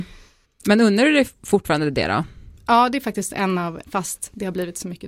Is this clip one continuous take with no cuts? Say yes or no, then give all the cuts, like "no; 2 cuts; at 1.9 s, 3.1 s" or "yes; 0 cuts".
no; 1 cut; at 3.8 s